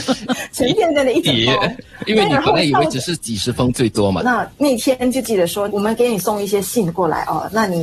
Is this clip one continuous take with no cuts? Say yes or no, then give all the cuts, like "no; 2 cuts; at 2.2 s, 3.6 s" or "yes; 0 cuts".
no; 2 cuts; at 4.2 s, 5.7 s